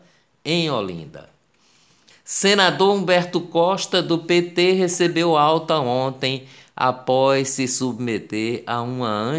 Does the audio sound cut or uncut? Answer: cut